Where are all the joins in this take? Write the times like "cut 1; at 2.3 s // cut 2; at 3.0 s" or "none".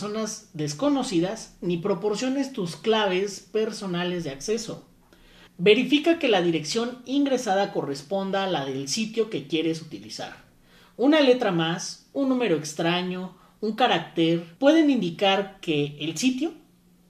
cut 1; at 5.5 s // cut 2; at 14.6 s